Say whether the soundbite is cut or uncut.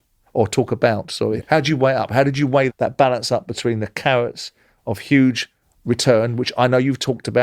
cut